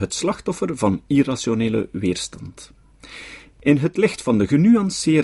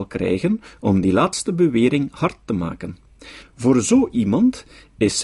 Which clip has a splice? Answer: second; 1 cut; at 3.4 s

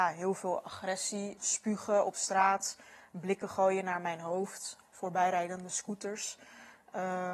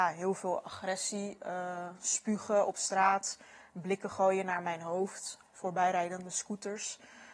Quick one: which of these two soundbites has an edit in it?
first; 1 cut; at 1.4 s

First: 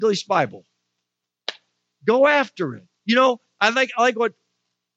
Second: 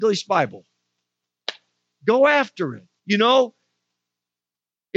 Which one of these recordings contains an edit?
second; 1 cut; at 3.0 s

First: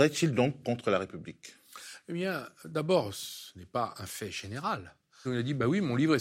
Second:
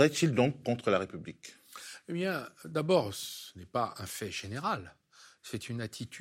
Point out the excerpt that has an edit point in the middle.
first; 1 cut; at 5.2 s

